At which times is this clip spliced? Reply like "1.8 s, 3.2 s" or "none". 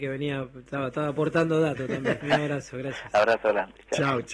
2.2 s